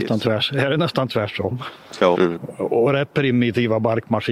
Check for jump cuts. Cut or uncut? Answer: cut